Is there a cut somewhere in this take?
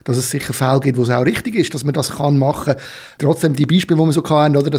no; 0 cuts

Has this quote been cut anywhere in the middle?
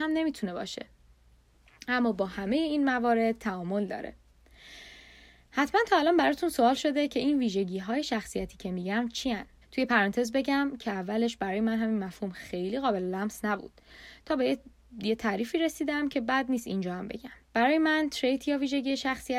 yes; 2 cuts; at 9.6 s, 17.4 s

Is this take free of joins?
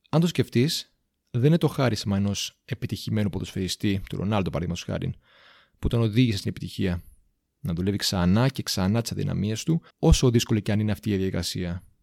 no; 2 cuts; at 7.5 s, 9.9 s

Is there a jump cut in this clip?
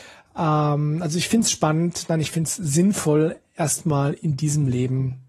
no; 0 cuts

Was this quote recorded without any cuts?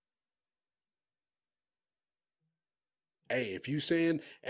yes; 0 cuts

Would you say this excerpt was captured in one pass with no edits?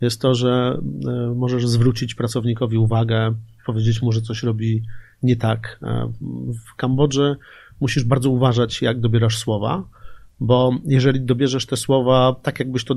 yes; 0 cuts

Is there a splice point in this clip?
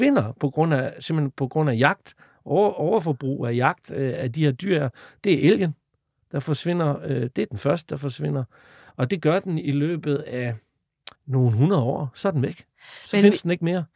yes; 2 cuts; at 8.9 s, 11.2 s

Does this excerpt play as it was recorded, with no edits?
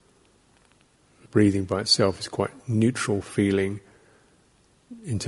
no; 1 cut; at 1.3 s

